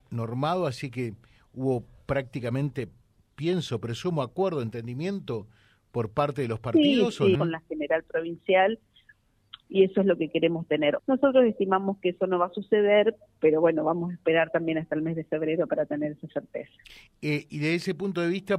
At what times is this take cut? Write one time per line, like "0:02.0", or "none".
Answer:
0:07.4
0:11.0